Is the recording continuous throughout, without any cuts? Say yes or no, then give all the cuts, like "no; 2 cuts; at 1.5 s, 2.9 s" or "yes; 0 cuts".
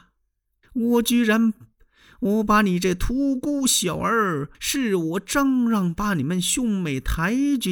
no; 1 cut; at 4.5 s